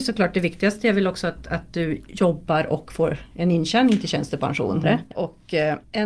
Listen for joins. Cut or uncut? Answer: cut